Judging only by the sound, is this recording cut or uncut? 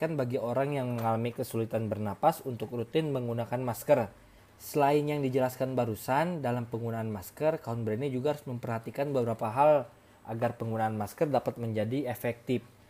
cut